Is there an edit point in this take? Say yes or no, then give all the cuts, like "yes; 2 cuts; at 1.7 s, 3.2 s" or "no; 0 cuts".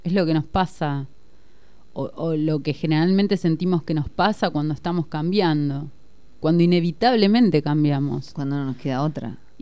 no; 0 cuts